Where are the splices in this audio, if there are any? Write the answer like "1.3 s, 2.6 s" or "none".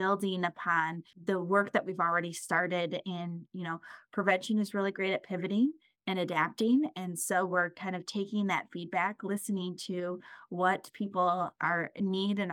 none